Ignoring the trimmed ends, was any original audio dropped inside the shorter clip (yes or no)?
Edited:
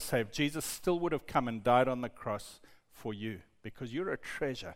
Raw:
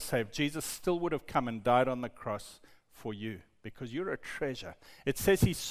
no